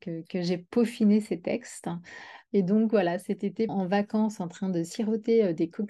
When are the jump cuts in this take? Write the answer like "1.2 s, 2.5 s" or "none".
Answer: 2.5 s, 3.7 s